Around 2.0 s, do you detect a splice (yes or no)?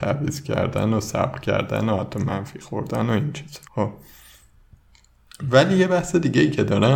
no